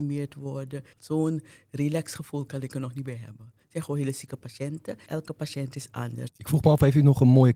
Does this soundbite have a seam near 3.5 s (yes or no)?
no